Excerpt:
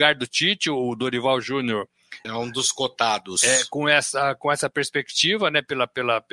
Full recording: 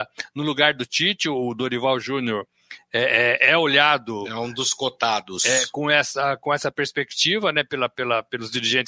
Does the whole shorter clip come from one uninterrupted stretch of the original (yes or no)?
no